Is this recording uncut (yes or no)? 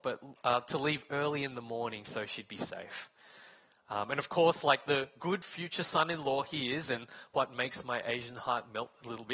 yes